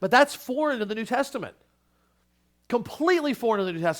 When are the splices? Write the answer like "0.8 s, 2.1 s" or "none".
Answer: none